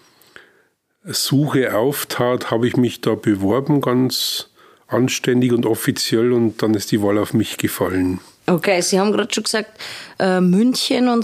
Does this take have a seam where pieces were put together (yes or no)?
no